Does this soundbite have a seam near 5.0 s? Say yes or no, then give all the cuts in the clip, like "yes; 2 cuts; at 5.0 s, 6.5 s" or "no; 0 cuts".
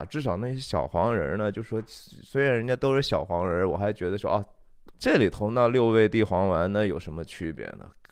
yes; 1 cut; at 5.0 s